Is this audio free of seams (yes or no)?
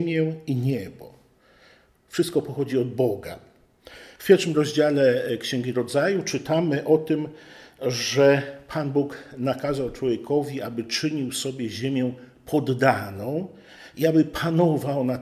no